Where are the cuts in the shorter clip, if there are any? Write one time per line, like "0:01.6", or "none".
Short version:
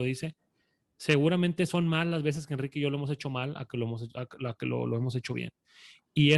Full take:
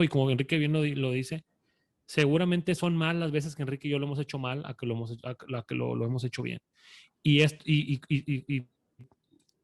none